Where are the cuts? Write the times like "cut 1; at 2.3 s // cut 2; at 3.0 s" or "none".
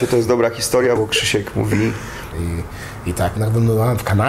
cut 1; at 1.0 s // cut 2; at 2.3 s // cut 3; at 3.4 s